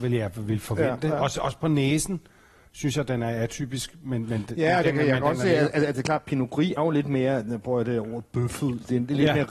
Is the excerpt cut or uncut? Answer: cut